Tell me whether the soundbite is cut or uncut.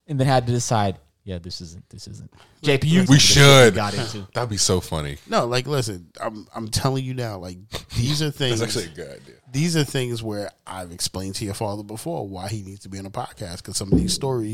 cut